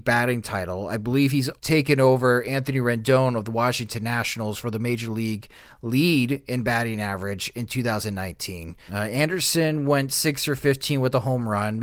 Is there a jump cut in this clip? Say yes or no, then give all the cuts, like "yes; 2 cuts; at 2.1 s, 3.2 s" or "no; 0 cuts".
yes; 2 cuts; at 1.6 s, 8.9 s